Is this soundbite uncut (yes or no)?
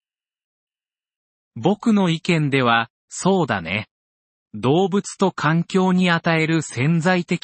yes